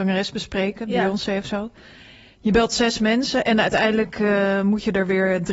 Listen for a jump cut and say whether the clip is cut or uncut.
uncut